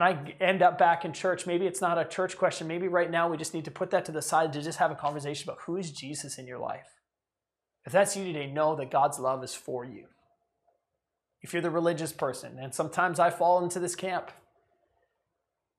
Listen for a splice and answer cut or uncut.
uncut